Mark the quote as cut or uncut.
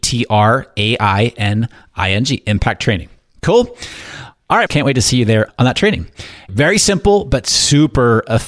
cut